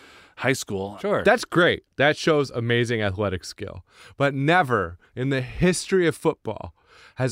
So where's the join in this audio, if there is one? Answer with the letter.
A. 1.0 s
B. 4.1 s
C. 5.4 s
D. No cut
A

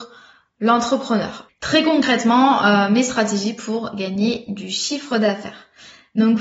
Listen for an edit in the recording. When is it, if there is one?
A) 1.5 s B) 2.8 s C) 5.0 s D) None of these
A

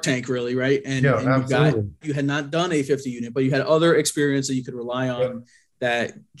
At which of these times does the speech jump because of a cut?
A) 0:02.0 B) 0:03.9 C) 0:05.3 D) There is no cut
A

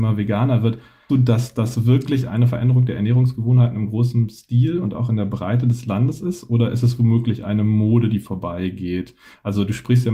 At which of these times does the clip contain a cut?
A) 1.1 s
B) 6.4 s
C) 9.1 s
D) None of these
A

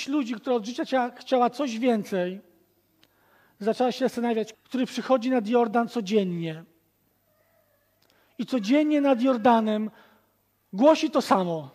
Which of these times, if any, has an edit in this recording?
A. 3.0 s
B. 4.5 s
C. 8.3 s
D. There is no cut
B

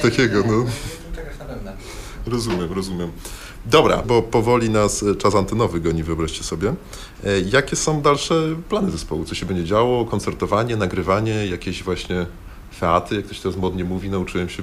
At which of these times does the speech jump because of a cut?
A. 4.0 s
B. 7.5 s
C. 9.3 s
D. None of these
A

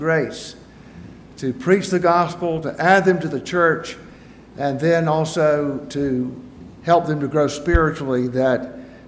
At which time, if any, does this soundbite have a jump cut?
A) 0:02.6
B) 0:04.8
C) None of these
A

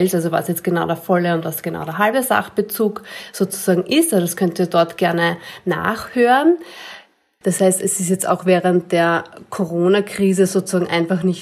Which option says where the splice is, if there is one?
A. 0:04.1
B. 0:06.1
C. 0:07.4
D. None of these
C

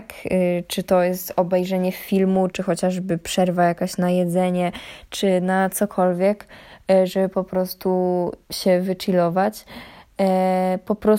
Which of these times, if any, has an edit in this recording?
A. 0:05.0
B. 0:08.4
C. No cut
B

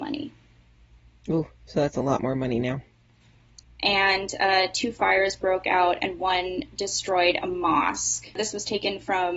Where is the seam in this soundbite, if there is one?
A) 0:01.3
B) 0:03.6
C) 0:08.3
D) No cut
B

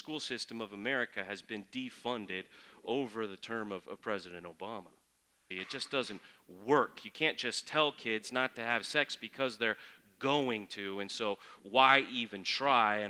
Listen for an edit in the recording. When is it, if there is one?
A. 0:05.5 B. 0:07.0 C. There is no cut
A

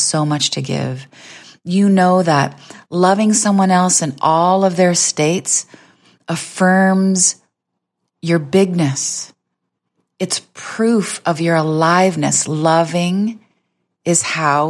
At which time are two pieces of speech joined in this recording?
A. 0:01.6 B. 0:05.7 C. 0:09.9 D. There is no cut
D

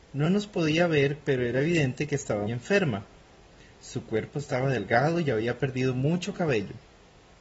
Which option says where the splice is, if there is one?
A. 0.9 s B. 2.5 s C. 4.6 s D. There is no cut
B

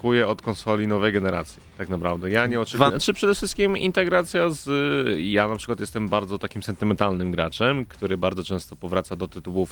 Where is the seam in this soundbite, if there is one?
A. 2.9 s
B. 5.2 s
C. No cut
A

